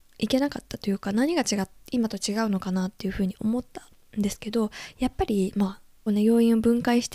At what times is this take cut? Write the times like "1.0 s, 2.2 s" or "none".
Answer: 6.1 s